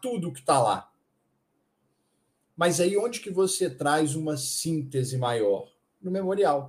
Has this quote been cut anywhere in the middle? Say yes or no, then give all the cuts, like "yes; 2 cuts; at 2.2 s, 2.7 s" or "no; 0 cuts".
no; 0 cuts